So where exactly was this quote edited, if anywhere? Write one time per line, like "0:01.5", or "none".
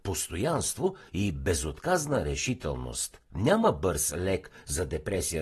0:03.2

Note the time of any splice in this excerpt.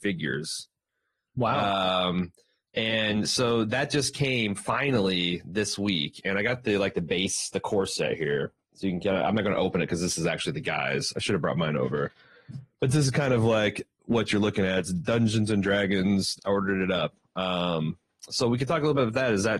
0:16.4

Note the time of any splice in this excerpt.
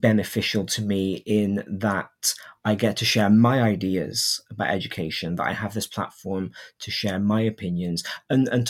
none

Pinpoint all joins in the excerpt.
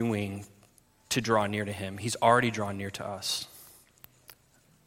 none

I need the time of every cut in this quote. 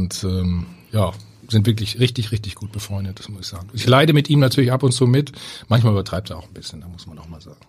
none

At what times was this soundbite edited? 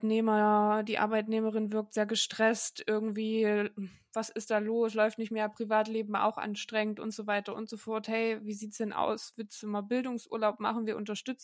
none

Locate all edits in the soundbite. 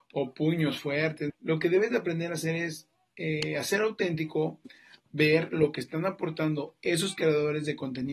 0:01.3

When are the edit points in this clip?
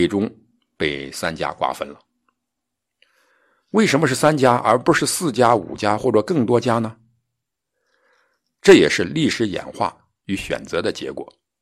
none

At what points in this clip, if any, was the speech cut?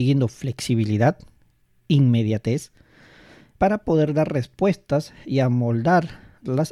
0:03.6

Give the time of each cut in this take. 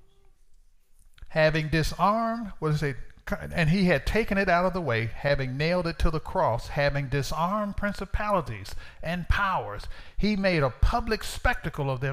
none

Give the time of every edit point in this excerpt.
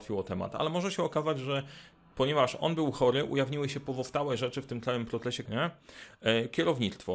0:05.4

